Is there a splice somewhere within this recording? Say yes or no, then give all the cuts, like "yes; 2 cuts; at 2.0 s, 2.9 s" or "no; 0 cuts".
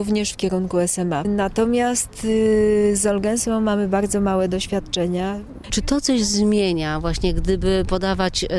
yes; 2 cuts; at 1.2 s, 5.7 s